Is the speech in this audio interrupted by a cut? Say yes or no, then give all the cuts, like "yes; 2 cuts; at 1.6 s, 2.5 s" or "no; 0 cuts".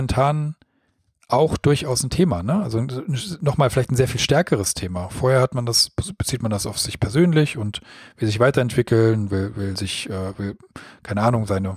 no; 0 cuts